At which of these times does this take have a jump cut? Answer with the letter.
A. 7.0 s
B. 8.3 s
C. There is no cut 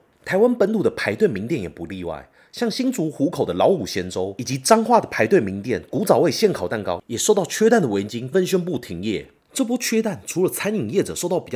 B